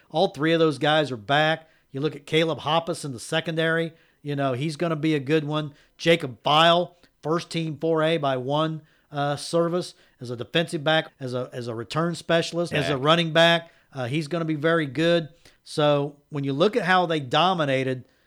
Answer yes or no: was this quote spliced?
yes